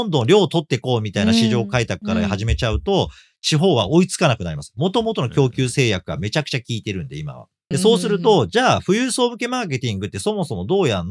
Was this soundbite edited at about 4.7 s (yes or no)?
no